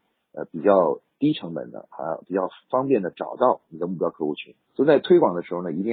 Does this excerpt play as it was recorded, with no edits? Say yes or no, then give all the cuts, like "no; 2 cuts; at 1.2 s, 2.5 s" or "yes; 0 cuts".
no; 1 cut; at 4.7 s